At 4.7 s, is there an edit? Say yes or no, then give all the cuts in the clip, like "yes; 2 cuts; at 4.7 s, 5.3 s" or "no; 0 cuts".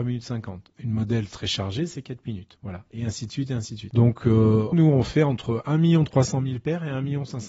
yes; 1 cut; at 4.7 s